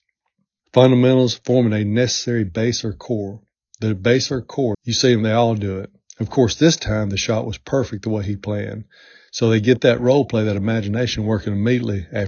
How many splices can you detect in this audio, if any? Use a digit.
1